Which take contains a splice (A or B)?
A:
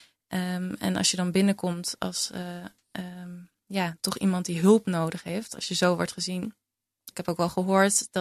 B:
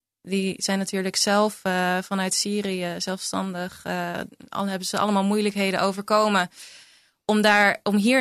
A